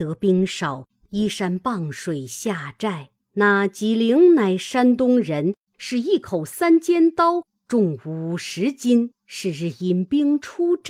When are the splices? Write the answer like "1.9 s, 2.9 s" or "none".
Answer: none